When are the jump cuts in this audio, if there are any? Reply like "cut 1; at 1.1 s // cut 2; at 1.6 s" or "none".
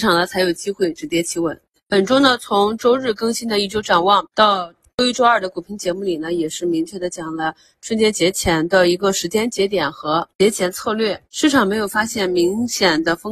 none